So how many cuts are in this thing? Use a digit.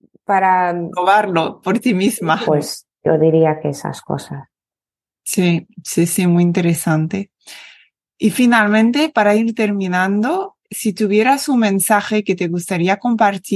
1